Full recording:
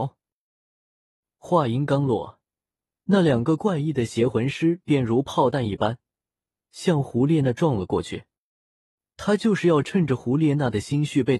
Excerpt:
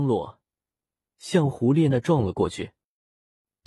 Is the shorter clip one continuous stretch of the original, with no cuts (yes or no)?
no